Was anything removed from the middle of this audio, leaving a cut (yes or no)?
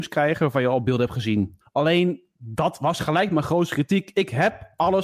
yes